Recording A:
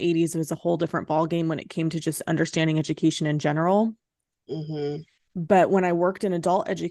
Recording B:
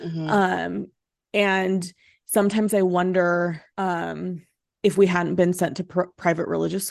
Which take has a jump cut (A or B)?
B